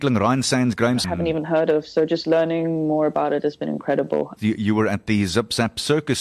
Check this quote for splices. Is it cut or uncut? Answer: cut